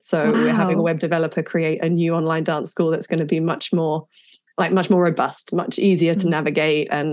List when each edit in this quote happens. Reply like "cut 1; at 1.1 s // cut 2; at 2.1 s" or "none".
none